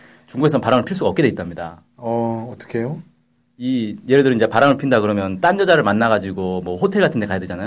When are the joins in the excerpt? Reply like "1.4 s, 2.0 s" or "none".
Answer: none